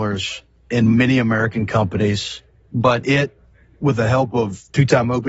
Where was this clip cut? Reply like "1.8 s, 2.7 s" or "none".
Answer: none